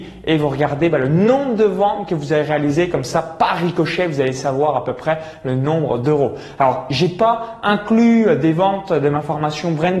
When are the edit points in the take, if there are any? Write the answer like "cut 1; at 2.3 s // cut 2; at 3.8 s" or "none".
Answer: none

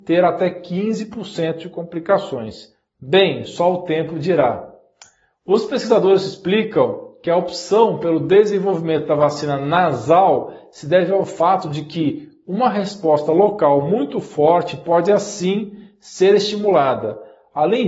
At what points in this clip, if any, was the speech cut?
none

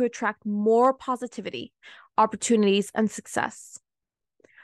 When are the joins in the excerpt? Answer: none

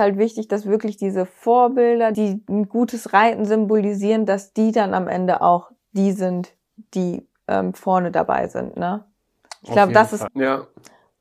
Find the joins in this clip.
cut 1; at 2.1 s // cut 2; at 10.3 s

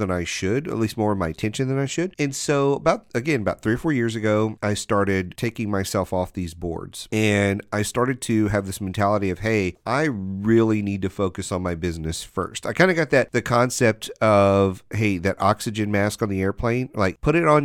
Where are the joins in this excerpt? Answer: none

